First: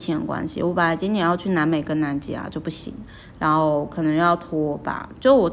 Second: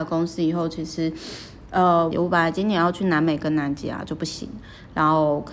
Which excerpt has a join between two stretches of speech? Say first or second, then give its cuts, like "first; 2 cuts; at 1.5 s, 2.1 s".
second; 1 cut; at 2.1 s